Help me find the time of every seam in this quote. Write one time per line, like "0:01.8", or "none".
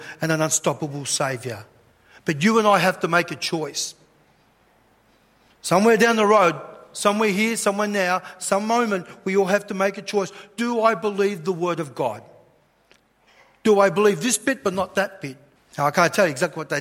0:15.6